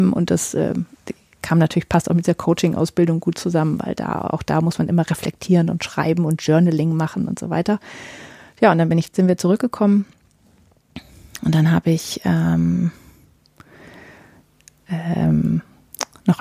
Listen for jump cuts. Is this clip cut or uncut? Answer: uncut